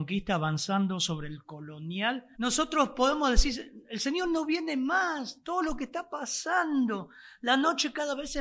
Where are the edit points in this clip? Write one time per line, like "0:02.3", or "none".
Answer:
0:02.4